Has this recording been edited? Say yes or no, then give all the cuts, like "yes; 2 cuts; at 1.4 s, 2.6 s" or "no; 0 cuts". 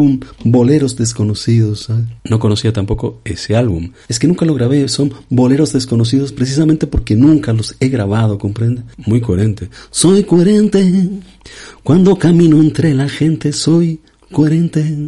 no; 0 cuts